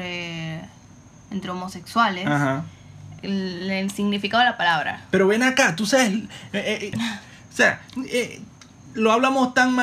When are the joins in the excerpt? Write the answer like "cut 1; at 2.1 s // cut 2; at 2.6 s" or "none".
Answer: cut 1; at 3.2 s // cut 2; at 6.9 s